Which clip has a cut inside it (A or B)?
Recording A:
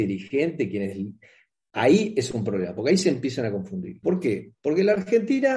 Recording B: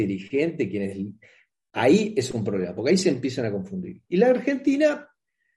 A